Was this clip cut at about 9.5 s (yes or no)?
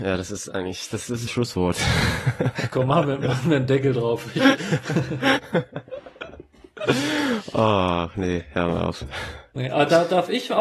no